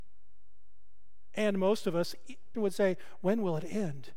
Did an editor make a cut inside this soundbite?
yes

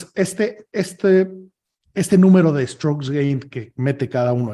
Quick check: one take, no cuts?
yes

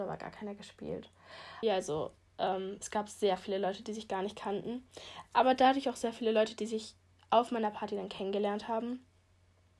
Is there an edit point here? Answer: yes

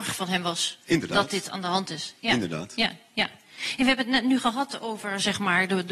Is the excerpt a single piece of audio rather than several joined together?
yes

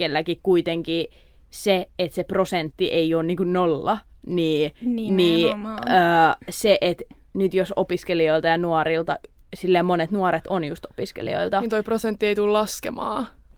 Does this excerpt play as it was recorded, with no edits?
yes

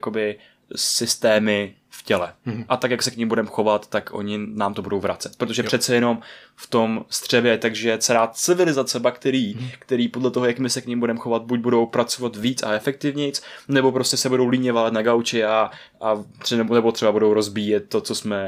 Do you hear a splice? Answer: no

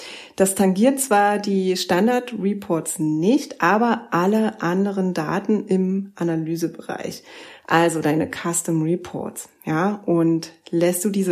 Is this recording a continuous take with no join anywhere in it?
yes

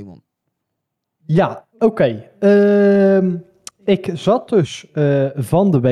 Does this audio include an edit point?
no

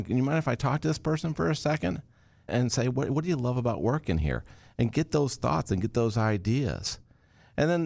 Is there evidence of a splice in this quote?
yes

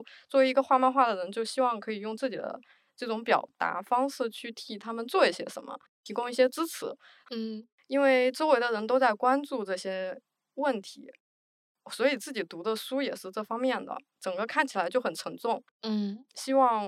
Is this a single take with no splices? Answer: no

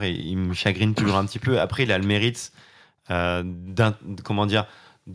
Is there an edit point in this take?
no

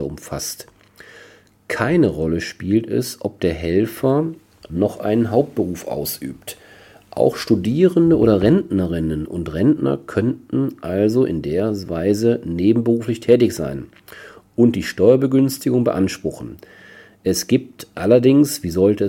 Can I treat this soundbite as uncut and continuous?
yes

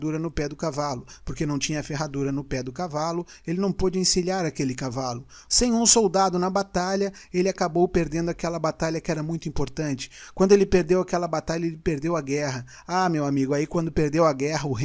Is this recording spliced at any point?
yes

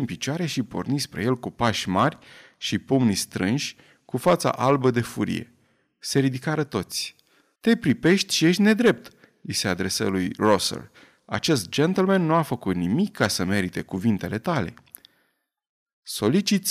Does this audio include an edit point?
yes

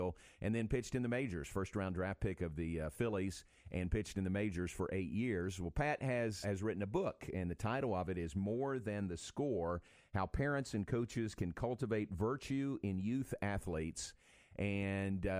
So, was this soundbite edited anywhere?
yes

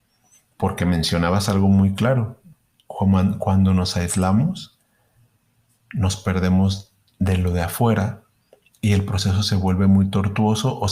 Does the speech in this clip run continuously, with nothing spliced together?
yes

